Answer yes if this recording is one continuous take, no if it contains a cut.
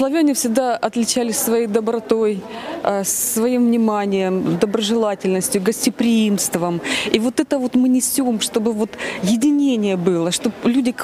yes